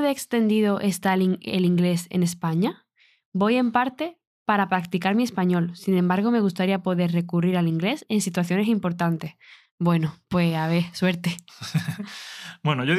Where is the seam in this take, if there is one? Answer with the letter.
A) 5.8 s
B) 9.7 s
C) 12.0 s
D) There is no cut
D